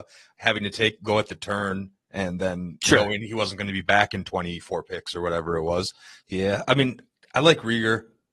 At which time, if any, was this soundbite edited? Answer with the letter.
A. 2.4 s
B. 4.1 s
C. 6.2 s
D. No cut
C